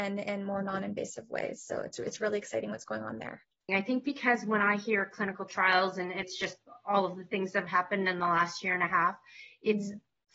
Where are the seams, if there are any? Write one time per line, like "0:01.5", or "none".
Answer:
0:03.7
0:06.2